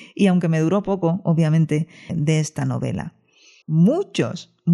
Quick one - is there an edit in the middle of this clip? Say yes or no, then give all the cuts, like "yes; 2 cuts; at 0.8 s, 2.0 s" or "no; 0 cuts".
yes; 2 cuts; at 2.1 s, 3.6 s